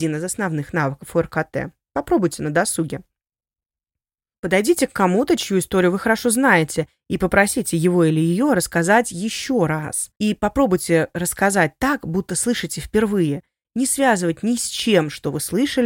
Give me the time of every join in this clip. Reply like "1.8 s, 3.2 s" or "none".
10.2 s